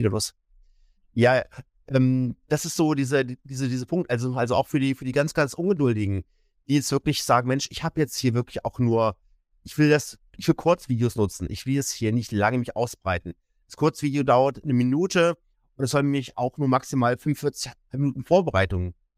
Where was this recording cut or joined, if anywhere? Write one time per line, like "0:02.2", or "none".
0:01.0